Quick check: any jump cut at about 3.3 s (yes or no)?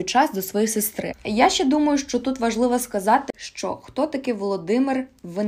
yes